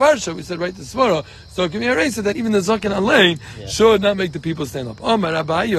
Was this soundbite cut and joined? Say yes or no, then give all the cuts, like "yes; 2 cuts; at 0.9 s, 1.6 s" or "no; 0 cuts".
no; 0 cuts